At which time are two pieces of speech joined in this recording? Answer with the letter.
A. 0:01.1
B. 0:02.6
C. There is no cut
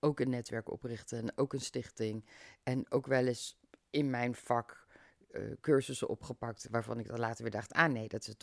C